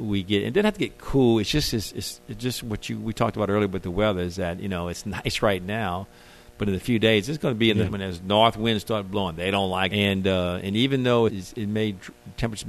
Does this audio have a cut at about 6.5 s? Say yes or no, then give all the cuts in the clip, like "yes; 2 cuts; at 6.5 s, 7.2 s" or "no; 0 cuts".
no; 3 cuts; at 7.8 s, 9.9 s, 11.3 s